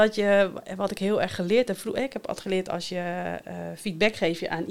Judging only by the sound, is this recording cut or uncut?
uncut